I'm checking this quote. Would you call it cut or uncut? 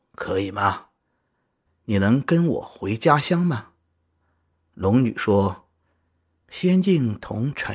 cut